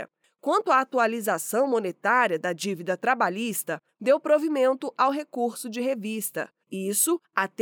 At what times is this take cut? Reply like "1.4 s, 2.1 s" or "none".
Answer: 6.6 s

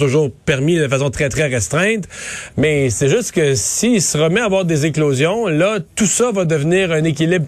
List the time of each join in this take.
1.1 s, 2.5 s

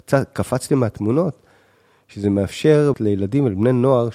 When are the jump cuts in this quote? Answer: 2.9 s

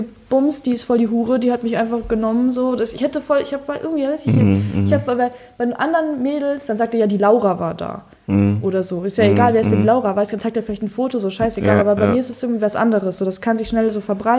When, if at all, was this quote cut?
none

